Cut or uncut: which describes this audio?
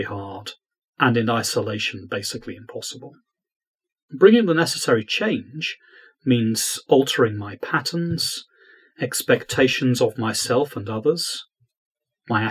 cut